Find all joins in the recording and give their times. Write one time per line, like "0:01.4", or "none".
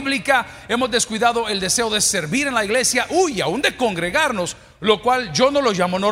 none